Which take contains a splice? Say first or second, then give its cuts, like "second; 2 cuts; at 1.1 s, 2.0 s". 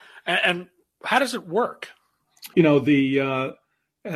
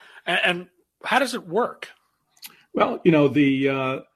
first; 1 cut; at 2.5 s